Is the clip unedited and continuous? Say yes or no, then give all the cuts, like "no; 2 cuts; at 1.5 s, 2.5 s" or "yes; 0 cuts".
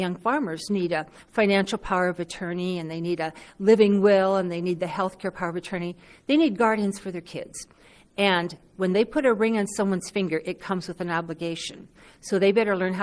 yes; 0 cuts